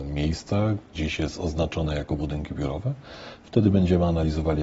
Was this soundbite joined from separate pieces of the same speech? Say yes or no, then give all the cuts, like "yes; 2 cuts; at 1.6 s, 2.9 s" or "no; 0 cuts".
yes; 1 cut; at 0.9 s